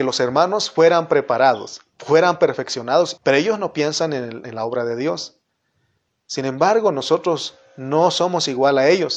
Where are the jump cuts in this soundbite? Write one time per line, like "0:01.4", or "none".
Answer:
0:03.2